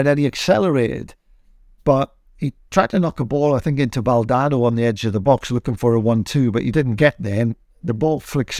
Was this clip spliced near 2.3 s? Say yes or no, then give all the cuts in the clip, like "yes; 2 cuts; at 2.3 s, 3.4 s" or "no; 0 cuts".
no; 0 cuts